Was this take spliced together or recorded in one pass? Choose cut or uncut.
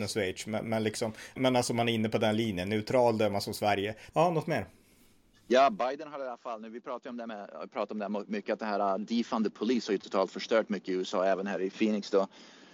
cut